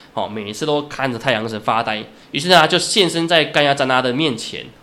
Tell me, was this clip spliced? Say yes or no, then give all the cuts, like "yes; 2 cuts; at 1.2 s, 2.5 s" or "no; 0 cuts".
yes; 1 cut; at 2.2 s